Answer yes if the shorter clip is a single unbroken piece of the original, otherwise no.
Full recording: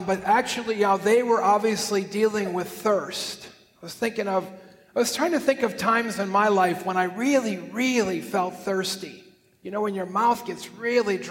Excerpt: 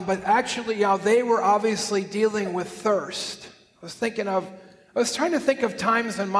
yes